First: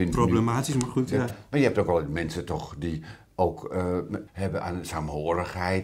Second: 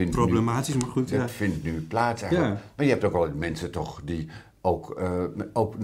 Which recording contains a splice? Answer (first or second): first